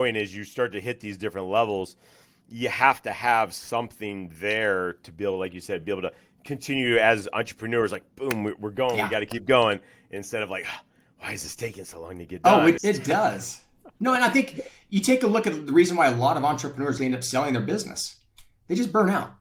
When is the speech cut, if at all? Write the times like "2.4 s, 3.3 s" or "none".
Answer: 12.8 s, 17.0 s